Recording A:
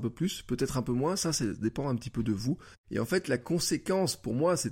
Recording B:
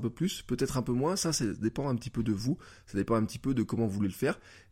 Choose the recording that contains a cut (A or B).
A